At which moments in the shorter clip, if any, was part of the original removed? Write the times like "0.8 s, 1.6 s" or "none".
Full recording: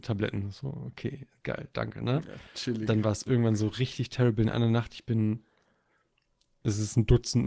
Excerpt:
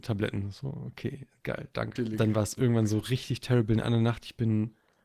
2.0 s